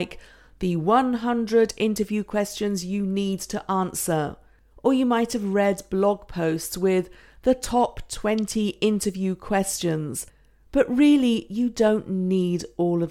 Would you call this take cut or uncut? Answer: uncut